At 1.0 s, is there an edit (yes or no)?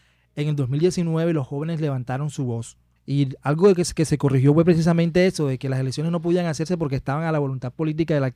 no